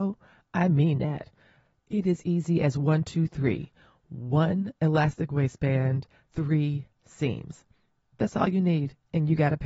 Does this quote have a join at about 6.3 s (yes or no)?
yes